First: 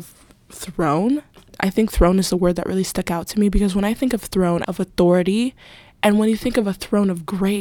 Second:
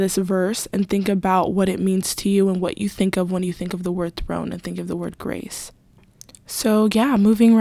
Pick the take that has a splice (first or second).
first